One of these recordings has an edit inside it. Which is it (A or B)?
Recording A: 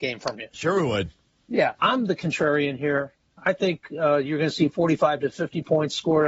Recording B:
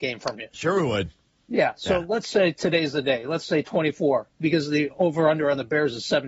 A